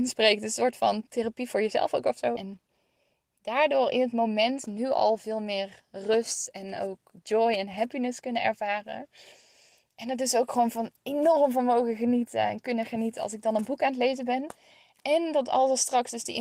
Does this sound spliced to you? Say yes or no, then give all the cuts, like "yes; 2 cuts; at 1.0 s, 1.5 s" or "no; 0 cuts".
yes; 1 cut; at 2.4 s